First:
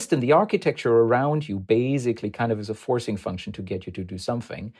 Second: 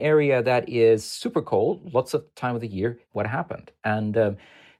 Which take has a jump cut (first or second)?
second